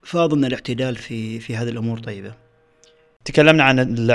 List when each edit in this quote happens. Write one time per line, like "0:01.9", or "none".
none